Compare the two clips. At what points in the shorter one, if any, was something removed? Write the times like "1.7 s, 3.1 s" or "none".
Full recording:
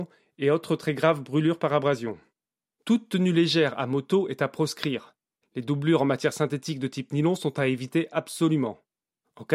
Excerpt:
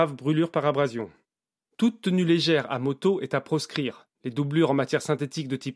4.1 s